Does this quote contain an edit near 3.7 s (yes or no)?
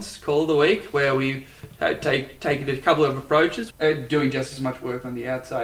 yes